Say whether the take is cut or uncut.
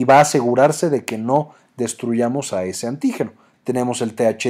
cut